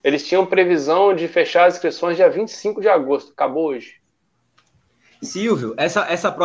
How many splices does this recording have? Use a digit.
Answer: 0